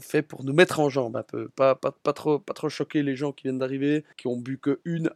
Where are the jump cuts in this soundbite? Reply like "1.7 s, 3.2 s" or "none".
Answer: 4.1 s